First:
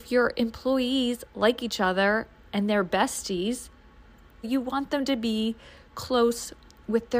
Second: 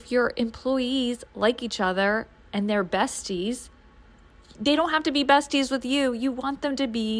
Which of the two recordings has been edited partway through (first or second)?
first